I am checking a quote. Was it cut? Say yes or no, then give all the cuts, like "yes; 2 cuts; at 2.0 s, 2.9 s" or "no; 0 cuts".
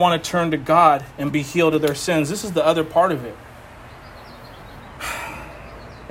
no; 0 cuts